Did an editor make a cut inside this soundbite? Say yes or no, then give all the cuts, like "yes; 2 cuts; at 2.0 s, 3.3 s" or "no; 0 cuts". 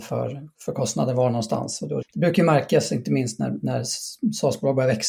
yes; 1 cut; at 2.0 s